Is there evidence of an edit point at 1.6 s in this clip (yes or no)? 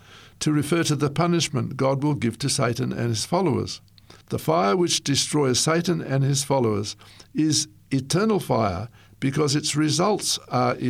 no